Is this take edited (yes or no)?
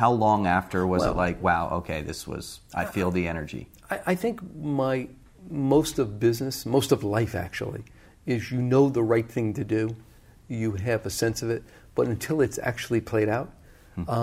no